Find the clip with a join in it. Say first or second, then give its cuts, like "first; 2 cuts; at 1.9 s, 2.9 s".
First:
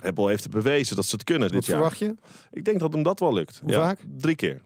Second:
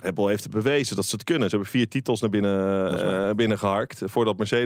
first; 1 cut; at 1.5 s